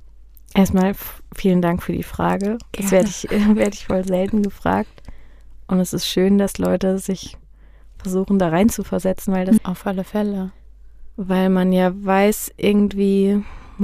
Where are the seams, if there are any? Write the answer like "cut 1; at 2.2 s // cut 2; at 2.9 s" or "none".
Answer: cut 1; at 9.6 s